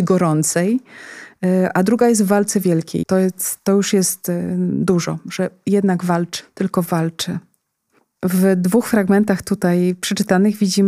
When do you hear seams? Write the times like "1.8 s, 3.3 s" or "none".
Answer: 3.0 s, 6.4 s